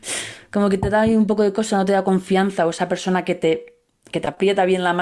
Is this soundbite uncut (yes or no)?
yes